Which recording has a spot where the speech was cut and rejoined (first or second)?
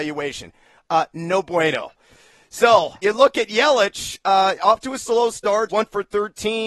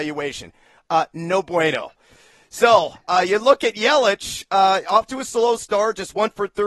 first